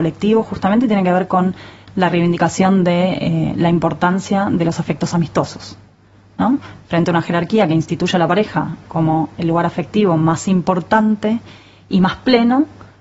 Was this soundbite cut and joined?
no; 0 cuts

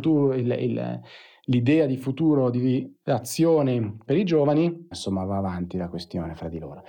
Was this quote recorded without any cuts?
no; 1 cut; at 4.9 s

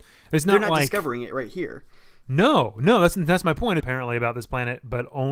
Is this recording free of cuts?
no; 1 cut; at 3.8 s

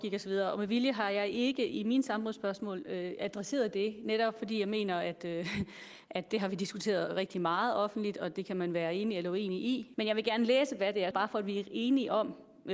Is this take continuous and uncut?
no; 2 cuts; at 9.9 s, 11.1 s

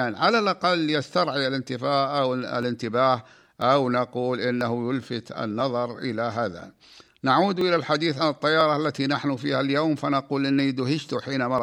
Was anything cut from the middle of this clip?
no; 0 cuts

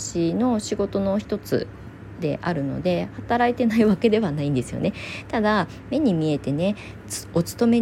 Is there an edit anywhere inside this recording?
no; 0 cuts

